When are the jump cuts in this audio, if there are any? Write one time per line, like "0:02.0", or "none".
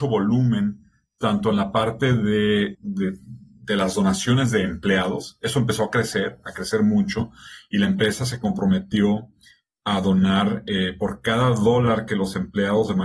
0:02.7

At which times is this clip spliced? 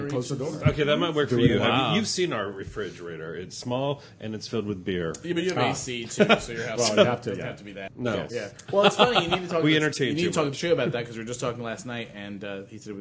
0:07.9

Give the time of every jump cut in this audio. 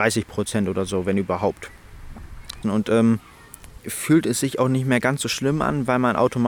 0:02.6
0:03.8

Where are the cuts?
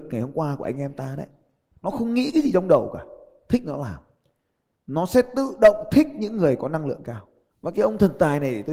none

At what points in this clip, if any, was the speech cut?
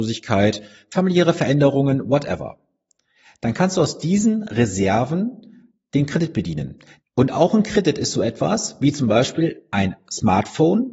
0:07.0

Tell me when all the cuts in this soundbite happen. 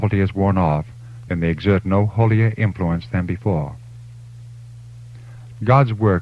0:01.3

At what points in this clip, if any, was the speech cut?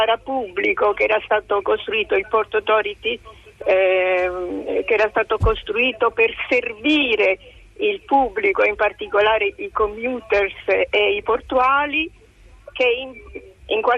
0:12.7

